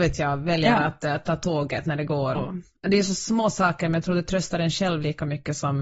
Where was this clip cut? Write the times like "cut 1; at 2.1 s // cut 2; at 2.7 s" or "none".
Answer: cut 1; at 2.3 s